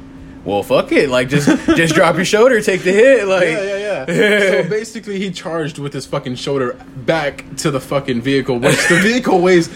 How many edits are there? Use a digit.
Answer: 0